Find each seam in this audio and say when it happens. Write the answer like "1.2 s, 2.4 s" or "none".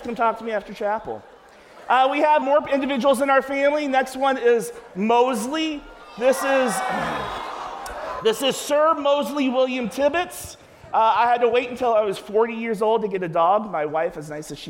2.4 s